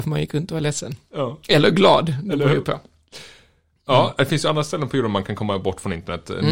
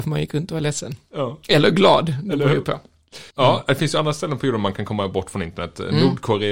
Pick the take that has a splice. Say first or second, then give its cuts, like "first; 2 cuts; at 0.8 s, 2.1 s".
second; 1 cut; at 3.3 s